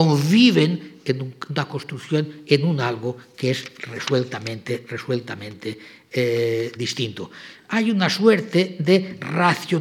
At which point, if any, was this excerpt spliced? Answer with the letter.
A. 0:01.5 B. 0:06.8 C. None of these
B